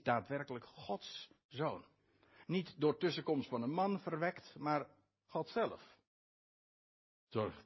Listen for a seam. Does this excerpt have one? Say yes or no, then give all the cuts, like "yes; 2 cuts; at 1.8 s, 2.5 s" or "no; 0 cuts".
no; 0 cuts